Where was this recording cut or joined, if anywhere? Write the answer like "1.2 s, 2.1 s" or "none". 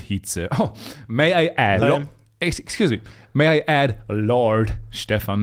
1.8 s